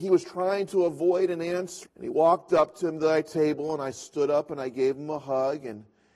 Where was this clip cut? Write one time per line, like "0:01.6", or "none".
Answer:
0:01.8